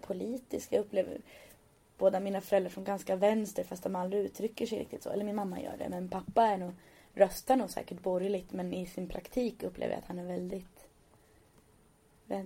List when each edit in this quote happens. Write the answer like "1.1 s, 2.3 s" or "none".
none